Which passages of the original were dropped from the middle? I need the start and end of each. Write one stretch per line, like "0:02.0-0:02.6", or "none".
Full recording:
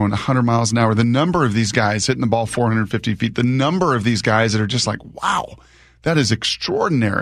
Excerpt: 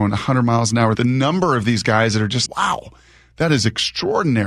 0:00.9-0:03.3
0:04.8-0:05.1